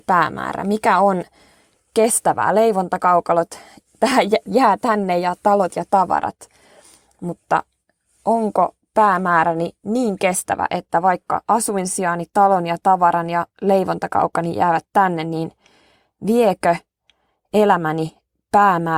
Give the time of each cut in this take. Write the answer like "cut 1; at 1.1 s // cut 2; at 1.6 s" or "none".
none